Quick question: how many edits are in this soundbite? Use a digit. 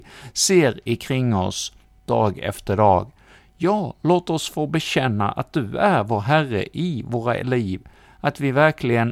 1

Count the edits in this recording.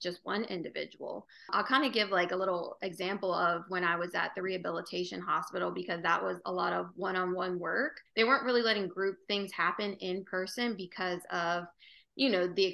1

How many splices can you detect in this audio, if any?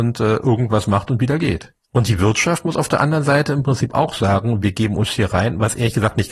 2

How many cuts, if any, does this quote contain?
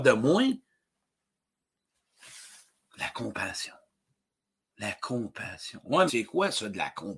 1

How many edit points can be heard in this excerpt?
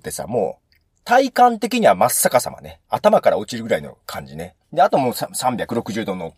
1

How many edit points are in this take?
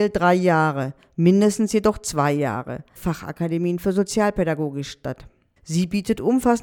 2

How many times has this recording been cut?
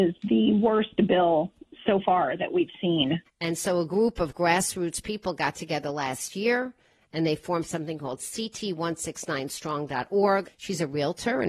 2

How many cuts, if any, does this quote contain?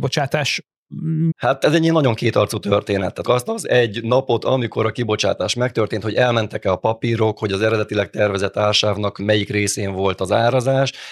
2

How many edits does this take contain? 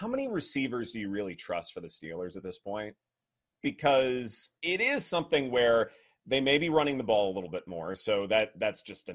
1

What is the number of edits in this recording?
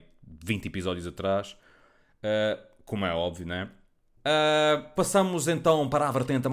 1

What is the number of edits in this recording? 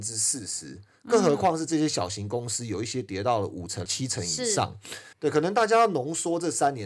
2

